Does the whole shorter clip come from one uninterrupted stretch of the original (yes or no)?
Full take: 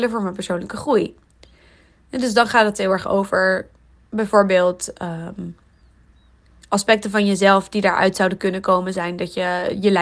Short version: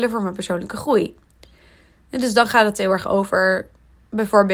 yes